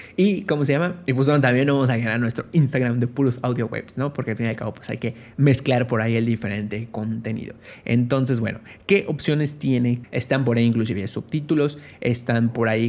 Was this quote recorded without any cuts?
no; 1 cut; at 10.0 s

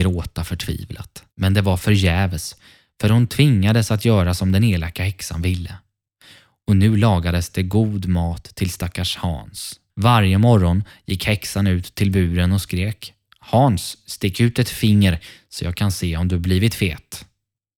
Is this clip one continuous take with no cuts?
no; 2 cuts; at 1.3 s, 9.9 s

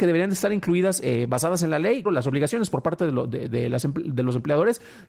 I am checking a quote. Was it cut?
yes; 1 cut; at 2.0 s

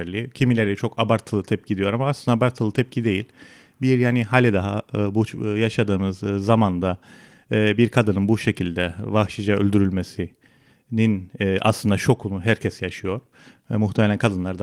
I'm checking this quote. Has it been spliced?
no; 0 cuts

